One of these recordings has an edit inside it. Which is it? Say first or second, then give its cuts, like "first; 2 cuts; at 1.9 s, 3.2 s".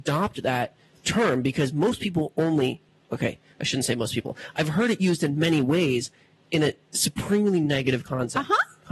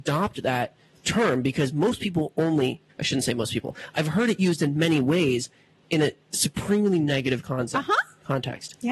second; 1 cut; at 2.9 s